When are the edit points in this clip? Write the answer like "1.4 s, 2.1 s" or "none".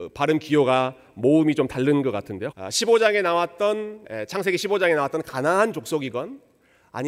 2.5 s, 4.0 s